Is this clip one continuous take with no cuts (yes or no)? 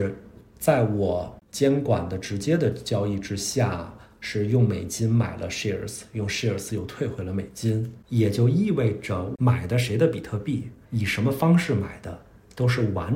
no